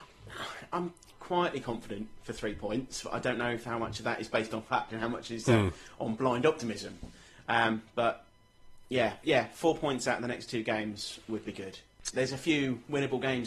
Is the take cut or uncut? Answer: cut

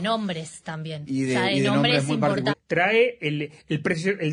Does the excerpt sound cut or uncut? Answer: cut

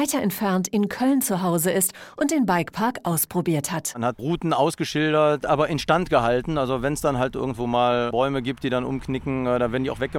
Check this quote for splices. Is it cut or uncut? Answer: cut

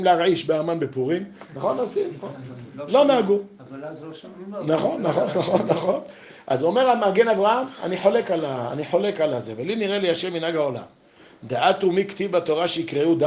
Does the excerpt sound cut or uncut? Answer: uncut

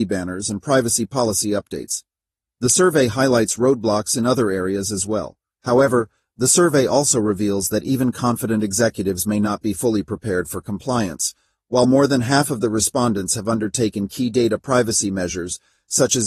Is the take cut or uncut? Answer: cut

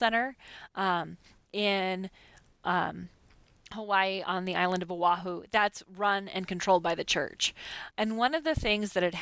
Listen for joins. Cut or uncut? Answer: cut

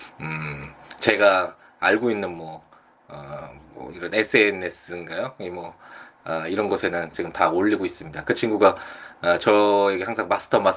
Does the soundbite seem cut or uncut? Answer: cut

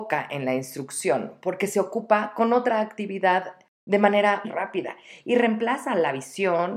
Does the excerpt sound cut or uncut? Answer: cut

